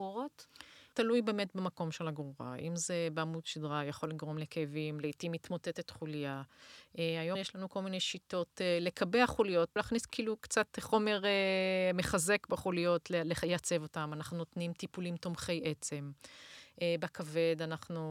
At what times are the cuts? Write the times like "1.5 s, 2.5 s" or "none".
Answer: none

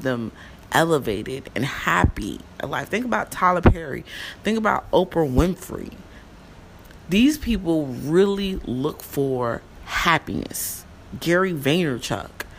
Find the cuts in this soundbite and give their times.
none

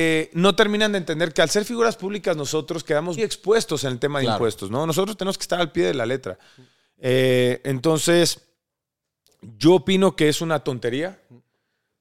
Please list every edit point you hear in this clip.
3.2 s

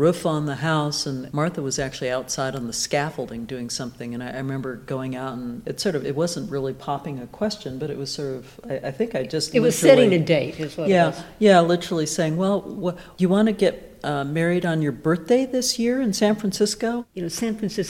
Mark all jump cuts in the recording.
none

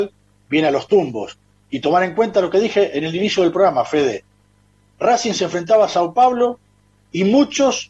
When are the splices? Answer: none

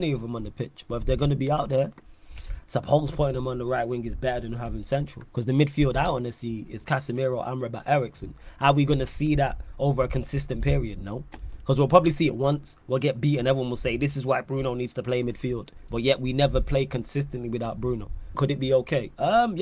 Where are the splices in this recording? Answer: 15.9 s, 18.3 s

